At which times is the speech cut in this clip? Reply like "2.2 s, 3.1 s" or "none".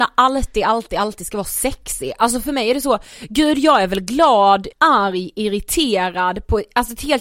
4.7 s